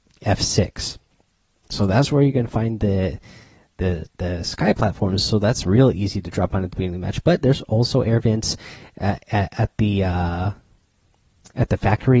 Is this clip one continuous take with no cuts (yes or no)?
yes